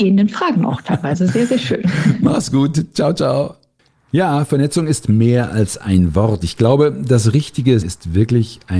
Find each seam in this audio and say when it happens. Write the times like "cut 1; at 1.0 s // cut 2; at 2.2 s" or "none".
cut 1; at 7.8 s